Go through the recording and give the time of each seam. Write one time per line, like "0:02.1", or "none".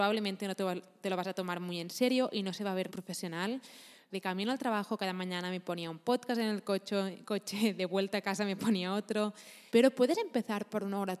0:02.9
0:04.1
0:09.7